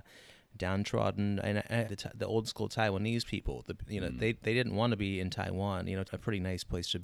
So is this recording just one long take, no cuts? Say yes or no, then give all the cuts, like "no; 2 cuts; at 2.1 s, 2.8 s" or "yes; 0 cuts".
no; 2 cuts; at 1.8 s, 6.0 s